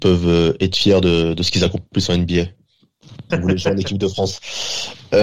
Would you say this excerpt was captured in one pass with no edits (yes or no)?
no